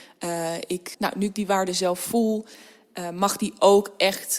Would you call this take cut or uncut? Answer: cut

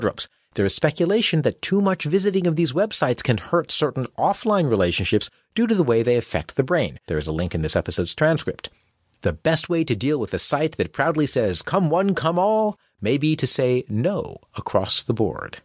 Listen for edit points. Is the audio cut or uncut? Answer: cut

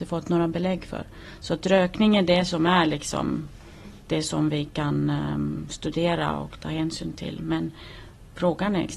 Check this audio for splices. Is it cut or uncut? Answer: uncut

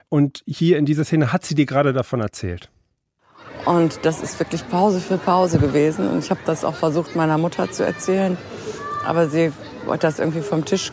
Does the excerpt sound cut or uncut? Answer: uncut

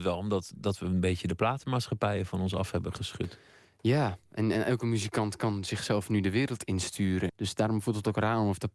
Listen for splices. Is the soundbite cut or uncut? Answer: cut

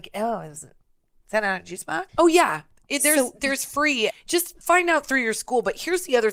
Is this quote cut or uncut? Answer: cut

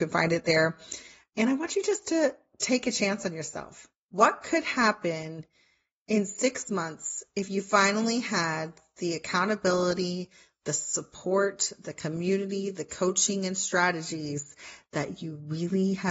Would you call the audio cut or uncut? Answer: uncut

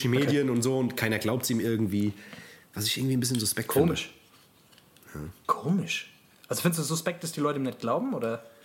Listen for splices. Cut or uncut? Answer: uncut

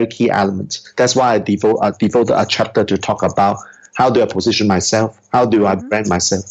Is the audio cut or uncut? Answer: uncut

